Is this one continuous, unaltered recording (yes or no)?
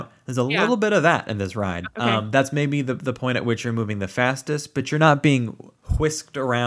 no